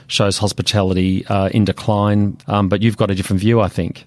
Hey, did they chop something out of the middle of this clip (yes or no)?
yes